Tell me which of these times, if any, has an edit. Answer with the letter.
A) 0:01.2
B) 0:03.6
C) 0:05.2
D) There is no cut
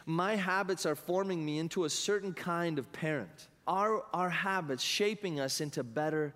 B